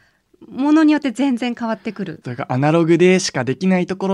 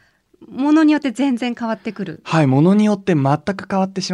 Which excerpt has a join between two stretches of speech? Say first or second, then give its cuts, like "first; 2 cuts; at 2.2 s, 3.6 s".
first; 1 cut; at 2.2 s